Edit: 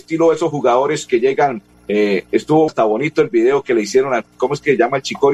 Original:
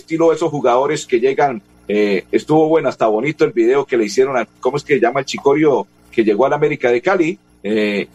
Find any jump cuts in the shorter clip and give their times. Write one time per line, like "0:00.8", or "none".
0:02.7